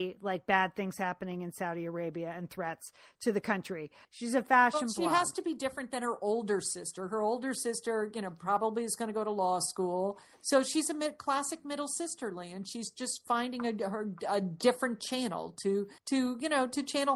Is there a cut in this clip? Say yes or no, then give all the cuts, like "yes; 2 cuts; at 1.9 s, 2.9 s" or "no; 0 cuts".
yes; 2 cuts; at 4.0 s, 16.0 s